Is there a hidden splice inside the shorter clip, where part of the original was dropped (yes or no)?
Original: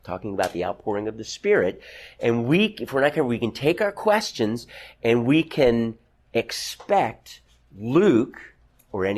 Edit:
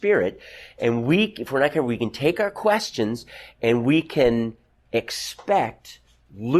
no